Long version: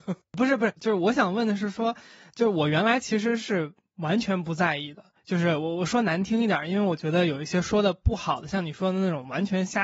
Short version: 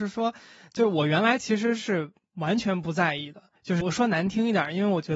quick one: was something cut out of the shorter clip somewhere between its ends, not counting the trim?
yes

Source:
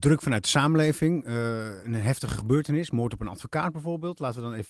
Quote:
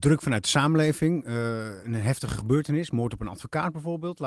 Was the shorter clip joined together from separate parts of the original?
no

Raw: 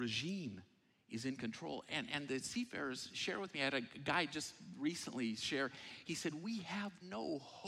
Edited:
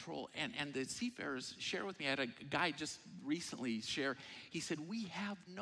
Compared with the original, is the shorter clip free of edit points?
yes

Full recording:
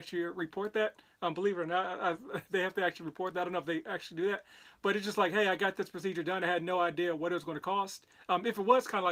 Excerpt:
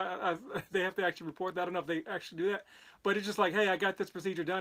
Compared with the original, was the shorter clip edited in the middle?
no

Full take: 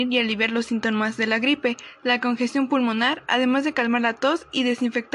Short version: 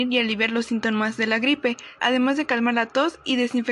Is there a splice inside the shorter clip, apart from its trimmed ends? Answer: yes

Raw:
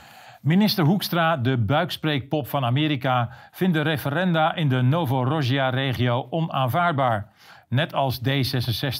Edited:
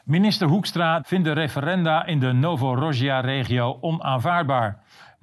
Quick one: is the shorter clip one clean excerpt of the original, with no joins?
no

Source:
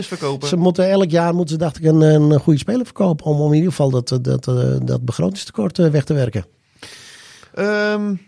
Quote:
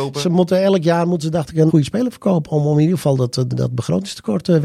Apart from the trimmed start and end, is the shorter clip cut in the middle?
yes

